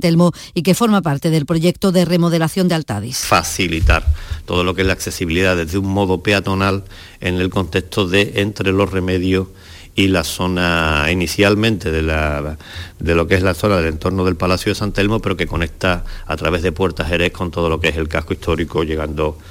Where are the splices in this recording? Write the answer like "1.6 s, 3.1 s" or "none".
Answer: none

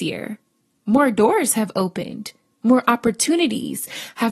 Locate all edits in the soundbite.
none

